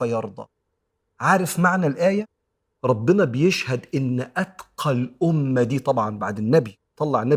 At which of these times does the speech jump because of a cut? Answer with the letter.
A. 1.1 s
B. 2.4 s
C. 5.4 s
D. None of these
D